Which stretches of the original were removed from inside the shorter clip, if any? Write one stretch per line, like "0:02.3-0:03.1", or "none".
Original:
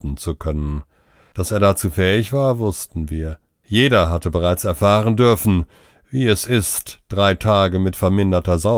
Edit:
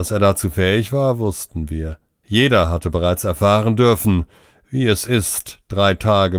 none